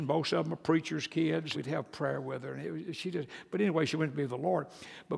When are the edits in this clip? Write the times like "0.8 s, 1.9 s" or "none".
1.5 s